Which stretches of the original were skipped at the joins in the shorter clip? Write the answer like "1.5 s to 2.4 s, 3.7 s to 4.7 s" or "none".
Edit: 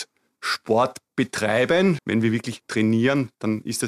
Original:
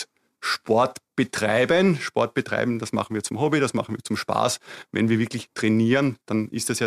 2.0 s to 4.9 s